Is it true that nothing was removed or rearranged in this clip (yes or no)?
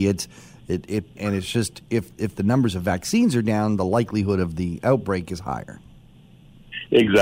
no